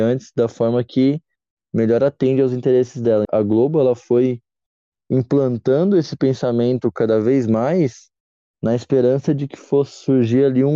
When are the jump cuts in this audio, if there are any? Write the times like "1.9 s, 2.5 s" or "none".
3.3 s